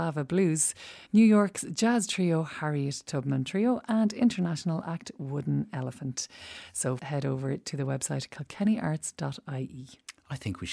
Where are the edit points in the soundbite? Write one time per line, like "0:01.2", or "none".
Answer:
0:01.1
0:07.0